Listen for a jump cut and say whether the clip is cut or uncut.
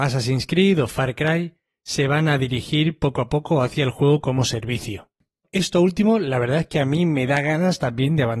uncut